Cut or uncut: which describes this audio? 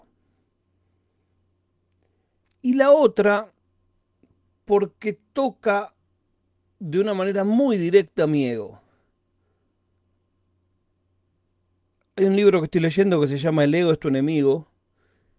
uncut